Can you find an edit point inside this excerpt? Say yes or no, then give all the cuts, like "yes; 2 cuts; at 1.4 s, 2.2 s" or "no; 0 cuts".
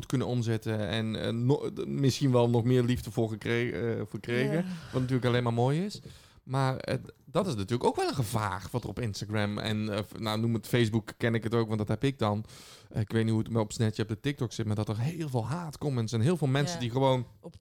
no; 0 cuts